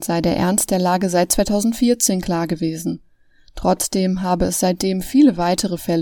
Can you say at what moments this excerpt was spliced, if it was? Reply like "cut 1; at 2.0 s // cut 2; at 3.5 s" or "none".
none